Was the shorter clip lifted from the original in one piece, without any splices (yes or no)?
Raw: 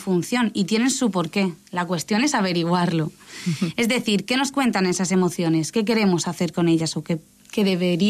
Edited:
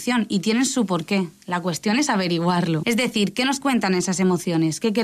no